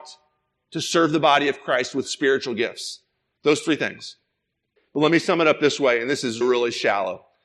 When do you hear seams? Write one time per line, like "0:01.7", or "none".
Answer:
0:04.8
0:06.4